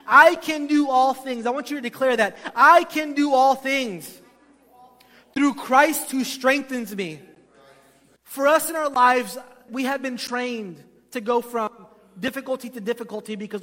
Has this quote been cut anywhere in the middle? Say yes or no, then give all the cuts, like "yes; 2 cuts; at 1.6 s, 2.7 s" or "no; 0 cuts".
yes; 2 cuts; at 8.2 s, 9.7 s